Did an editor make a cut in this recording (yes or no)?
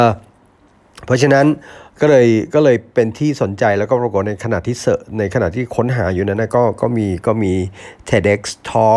no